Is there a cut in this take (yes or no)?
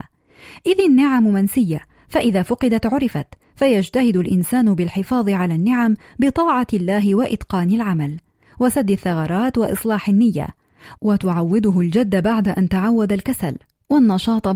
yes